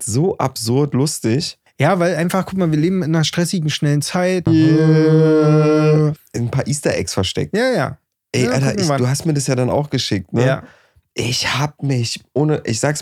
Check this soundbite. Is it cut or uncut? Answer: cut